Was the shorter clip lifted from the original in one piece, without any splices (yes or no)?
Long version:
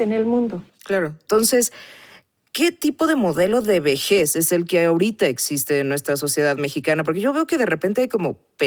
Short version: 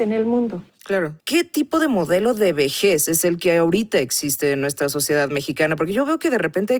no